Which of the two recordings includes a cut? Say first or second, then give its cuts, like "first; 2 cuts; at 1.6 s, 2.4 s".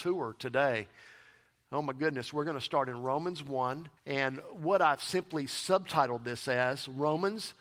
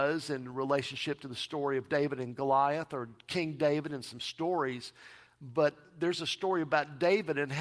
first; 1 cut; at 4.0 s